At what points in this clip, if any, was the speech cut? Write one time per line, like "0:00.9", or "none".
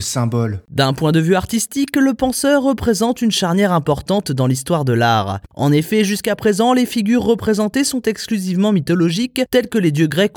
0:05.5